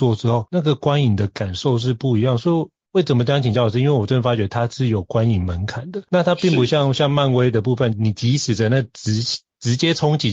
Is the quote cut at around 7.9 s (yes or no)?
yes